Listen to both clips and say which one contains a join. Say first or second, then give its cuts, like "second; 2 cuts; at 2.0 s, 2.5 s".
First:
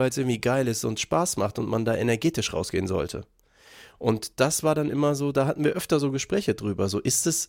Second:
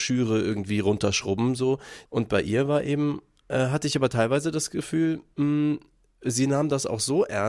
second; 1 cut; at 2.1 s